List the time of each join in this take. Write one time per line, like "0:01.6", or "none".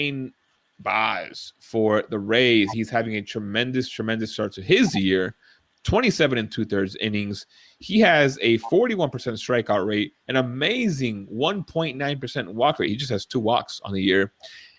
0:02.7